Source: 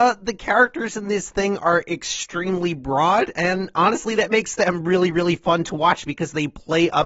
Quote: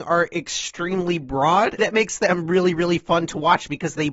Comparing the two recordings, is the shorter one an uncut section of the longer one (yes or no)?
no